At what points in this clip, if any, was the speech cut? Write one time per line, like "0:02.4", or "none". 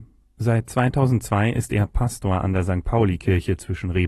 none